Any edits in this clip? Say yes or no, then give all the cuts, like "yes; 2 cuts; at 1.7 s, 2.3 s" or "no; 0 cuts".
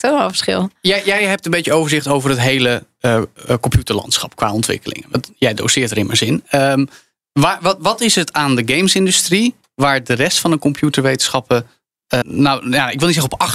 yes; 1 cut; at 12.2 s